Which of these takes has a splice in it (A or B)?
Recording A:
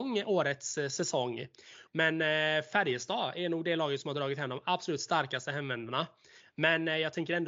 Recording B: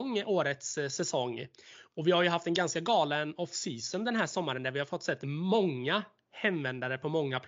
A